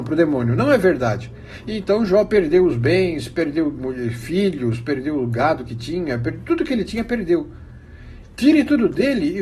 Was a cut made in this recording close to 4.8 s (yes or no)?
no